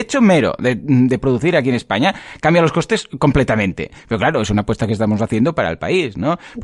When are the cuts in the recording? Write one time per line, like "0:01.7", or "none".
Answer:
none